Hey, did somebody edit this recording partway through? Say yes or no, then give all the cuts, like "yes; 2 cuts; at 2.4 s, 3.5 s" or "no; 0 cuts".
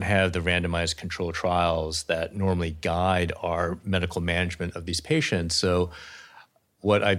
no; 0 cuts